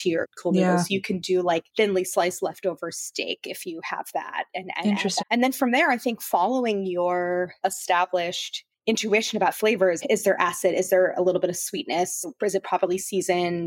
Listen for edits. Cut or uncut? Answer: cut